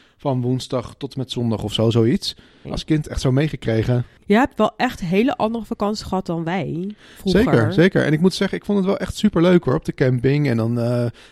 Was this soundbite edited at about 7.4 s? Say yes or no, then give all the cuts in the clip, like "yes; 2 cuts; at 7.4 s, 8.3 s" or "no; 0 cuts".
no; 1 cut; at 2.6 s